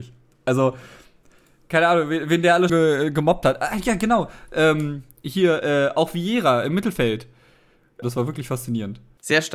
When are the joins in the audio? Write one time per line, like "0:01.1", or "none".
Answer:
0:02.7
0:08.0